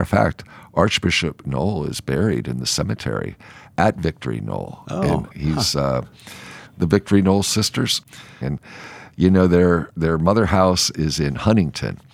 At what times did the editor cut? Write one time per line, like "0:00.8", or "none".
0:05.3
0:06.7
0:08.4